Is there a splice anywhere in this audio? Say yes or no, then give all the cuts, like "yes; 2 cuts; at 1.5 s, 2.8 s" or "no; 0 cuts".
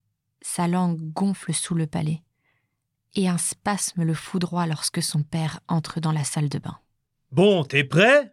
no; 0 cuts